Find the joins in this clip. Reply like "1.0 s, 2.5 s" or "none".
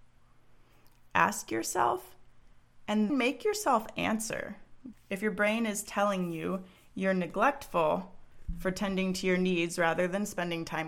3.1 s, 4.9 s